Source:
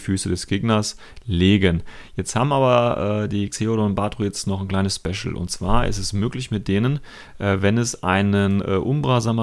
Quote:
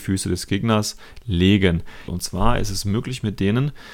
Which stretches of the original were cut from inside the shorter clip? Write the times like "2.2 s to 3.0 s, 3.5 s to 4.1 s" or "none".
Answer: 2.1 s to 5.4 s